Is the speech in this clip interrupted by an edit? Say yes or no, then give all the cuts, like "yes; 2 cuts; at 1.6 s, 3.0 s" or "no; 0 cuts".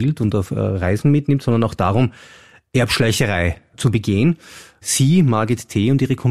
no; 0 cuts